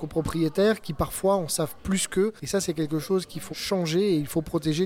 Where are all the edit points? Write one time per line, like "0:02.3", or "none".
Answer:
0:03.5